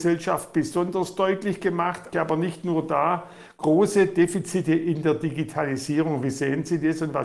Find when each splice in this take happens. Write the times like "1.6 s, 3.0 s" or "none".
2.1 s

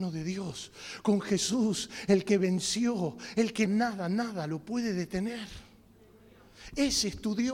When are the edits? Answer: 3.7 s

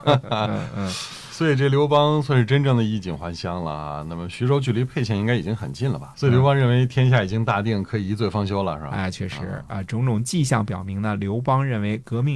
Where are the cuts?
6.1 s

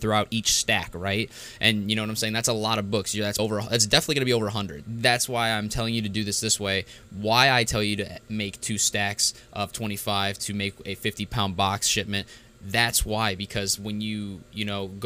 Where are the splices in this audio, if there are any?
3.4 s, 4.8 s

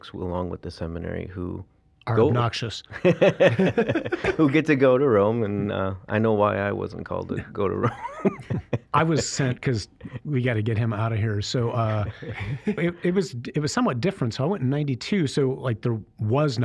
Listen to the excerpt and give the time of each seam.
12.8 s

